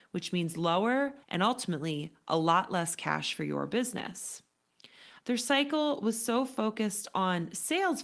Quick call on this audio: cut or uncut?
cut